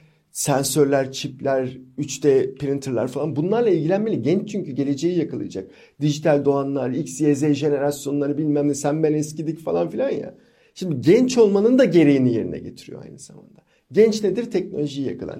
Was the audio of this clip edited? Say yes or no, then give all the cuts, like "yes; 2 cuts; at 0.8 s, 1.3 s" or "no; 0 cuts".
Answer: no; 0 cuts